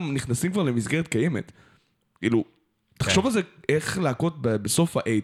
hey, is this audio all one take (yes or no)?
yes